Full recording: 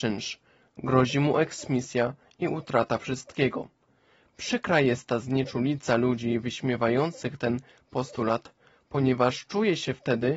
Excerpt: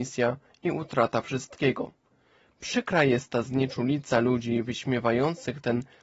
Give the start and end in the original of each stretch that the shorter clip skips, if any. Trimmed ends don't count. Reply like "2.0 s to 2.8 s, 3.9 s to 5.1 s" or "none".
none